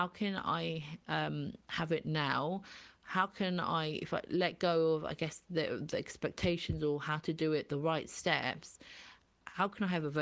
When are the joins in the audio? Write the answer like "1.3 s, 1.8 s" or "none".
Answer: 7.7 s

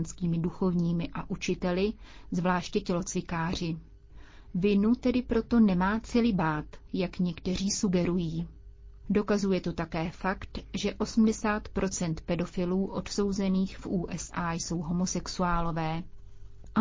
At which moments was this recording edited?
9.0 s

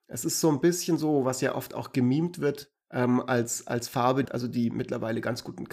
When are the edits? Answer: 2.8 s, 4.3 s

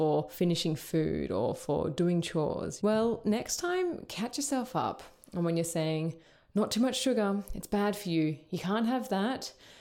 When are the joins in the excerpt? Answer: 2.8 s

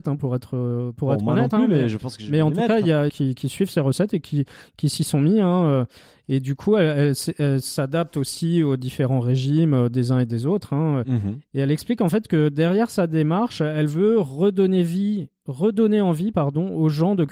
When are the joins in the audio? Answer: 3.1 s

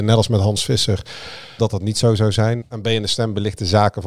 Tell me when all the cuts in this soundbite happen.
1.6 s, 2.6 s

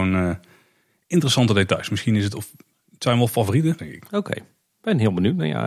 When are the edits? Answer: 3.8 s

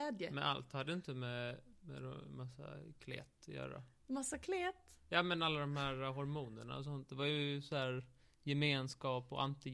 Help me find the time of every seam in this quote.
none

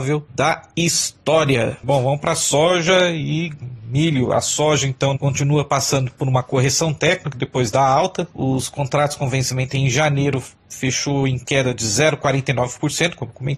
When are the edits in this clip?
5.1 s

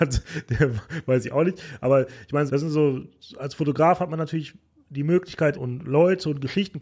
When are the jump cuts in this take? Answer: 2.5 s, 5.5 s

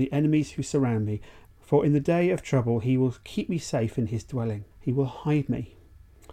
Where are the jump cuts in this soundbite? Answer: 1.5 s, 4.7 s

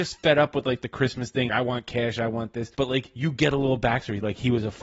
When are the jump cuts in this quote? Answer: 1.5 s, 2.7 s

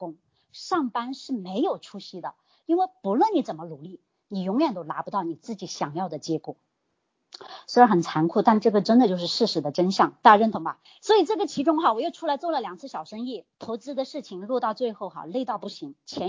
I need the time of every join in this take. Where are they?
10.9 s, 13.5 s

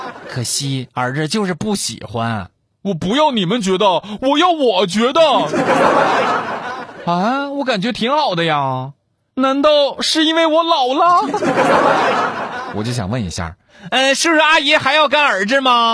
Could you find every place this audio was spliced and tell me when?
none

